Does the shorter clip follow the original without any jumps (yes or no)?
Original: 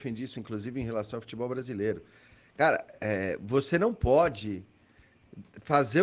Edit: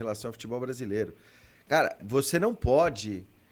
no